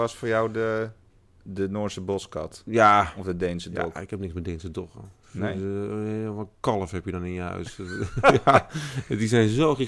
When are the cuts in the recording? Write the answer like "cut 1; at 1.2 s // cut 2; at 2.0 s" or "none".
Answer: none